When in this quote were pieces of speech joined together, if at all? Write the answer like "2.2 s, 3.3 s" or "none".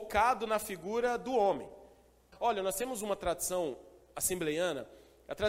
2.3 s